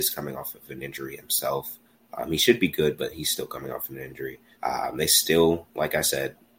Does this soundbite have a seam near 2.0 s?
no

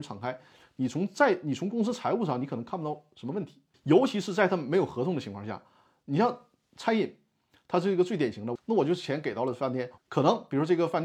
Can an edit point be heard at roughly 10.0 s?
yes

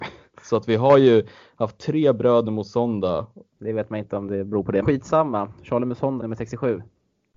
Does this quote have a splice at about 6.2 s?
yes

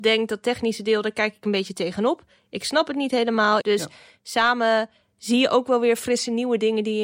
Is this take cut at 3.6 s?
yes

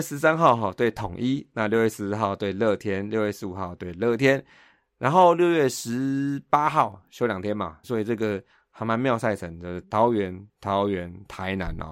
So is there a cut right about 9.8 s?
yes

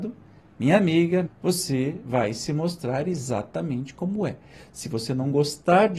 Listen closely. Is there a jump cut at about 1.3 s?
yes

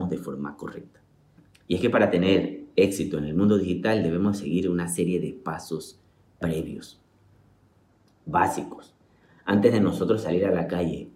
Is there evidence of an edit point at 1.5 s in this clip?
no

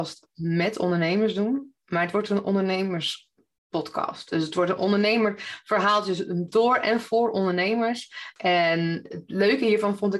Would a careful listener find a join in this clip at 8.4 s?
yes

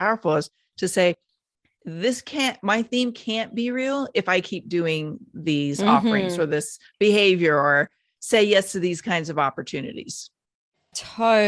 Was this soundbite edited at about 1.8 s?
yes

